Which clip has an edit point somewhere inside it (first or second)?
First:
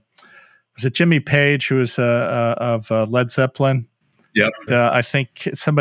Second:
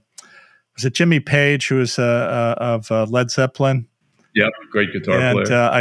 first